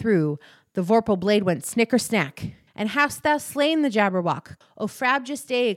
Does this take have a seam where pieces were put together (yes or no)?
yes